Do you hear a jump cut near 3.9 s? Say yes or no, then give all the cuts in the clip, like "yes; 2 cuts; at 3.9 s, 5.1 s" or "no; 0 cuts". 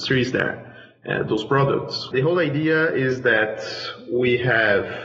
no; 1 cut; at 2.1 s